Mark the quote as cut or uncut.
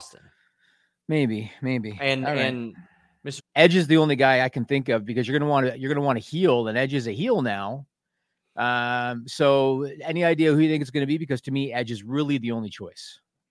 cut